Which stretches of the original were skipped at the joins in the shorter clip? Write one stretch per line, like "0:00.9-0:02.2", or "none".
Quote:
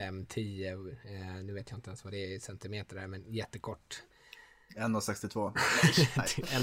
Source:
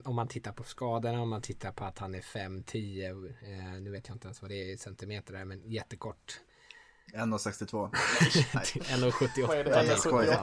none